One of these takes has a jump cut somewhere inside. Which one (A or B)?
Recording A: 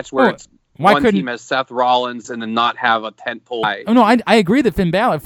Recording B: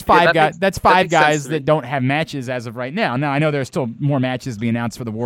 A